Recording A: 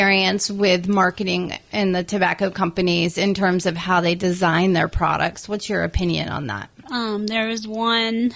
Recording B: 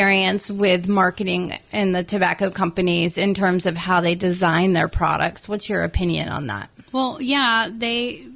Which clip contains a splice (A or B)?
A